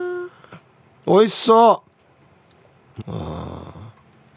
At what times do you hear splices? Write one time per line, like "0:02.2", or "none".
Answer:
0:03.0

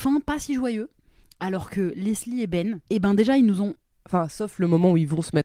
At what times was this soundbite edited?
0:03.9

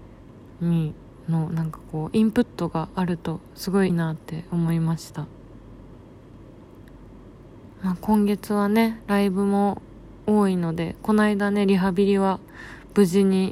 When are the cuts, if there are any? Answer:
0:03.9

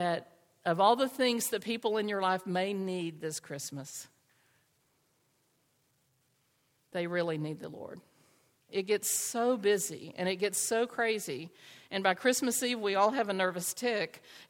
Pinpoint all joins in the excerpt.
0:08.7

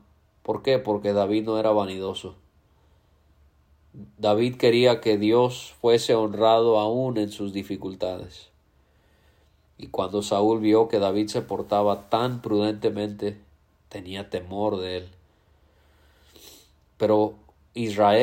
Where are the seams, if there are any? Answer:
none

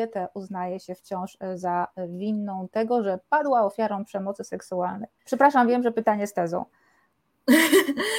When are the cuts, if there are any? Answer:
0:05.2

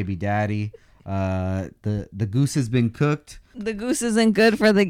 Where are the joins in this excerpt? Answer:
0:01.8
0:03.5

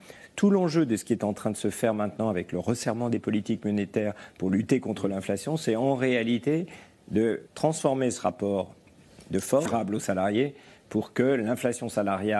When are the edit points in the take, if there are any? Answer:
0:07.5
0:09.7

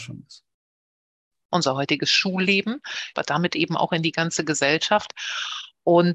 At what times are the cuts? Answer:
0:01.4
0:03.1

